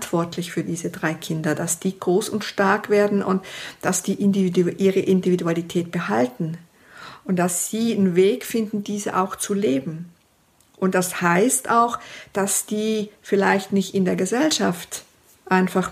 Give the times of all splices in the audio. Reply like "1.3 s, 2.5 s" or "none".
none